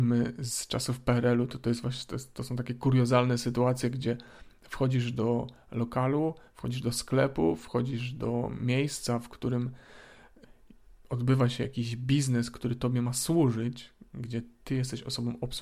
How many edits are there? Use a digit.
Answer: 0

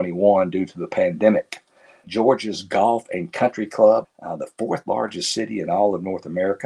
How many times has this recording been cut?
2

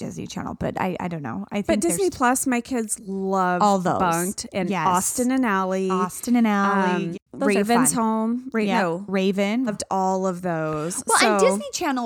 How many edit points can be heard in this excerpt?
2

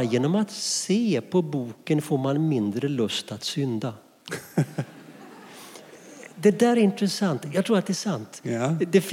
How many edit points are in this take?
0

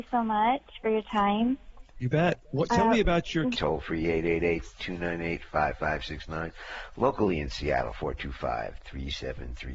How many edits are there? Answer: 2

